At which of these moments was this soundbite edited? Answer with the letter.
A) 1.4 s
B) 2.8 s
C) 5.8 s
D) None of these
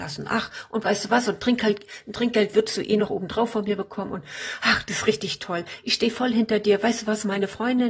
D